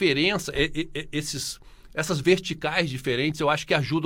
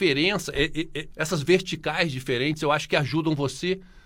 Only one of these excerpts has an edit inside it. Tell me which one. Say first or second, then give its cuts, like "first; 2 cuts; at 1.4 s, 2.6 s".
second; 1 cut; at 1.1 s